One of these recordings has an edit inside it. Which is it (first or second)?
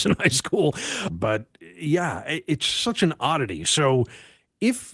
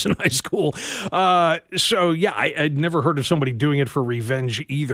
first